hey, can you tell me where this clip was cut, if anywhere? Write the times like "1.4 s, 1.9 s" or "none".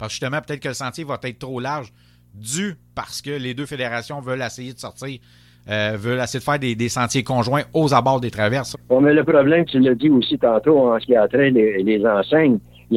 8.7 s